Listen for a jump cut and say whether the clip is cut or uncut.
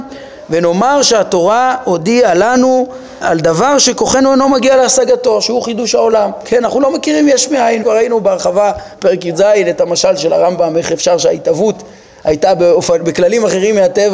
cut